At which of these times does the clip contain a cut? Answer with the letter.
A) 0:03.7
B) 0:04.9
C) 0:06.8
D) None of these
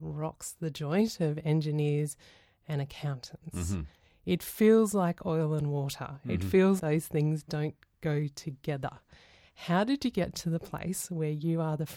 C